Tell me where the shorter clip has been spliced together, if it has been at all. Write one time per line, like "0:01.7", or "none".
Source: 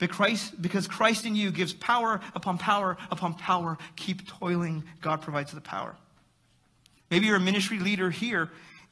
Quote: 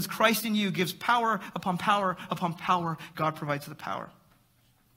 0:03.1

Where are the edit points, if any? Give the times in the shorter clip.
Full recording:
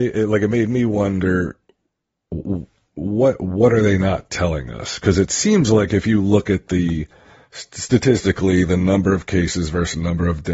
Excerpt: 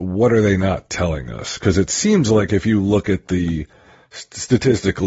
none

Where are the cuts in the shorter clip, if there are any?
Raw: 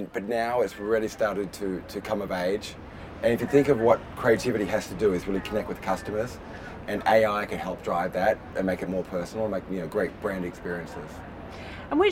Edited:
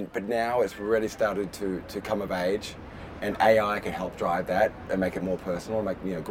0:03.2

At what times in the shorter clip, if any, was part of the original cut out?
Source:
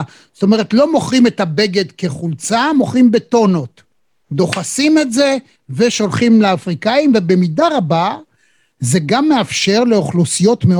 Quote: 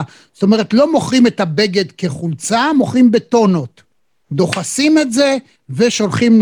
none

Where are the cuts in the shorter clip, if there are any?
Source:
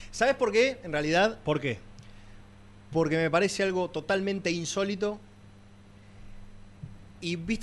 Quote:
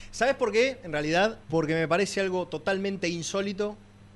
0:01.4

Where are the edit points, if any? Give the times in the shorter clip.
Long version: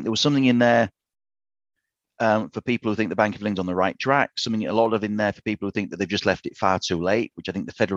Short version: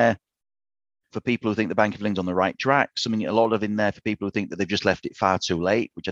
0:01.1

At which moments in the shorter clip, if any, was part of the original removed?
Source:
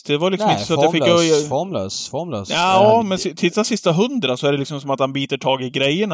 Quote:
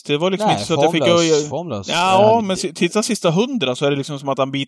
0:01.5

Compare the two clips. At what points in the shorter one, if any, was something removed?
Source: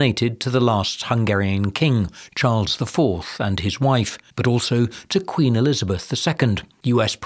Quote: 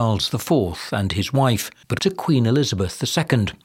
0:02.0

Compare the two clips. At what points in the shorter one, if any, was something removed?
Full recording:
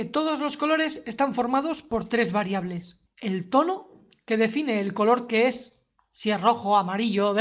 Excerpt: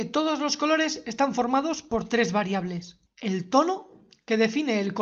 none

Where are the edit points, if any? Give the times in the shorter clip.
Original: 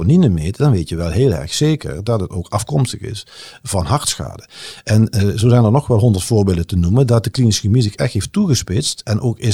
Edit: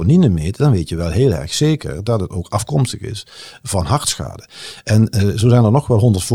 none

